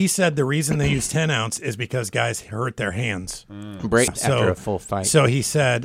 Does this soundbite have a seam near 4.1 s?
yes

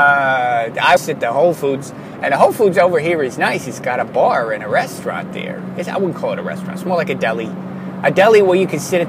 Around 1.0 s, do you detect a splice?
yes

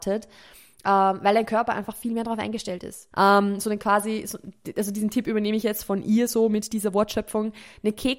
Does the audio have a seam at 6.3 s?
no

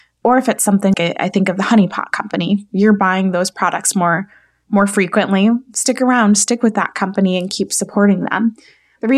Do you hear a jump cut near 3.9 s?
no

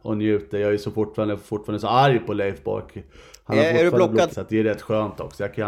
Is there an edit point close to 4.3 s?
yes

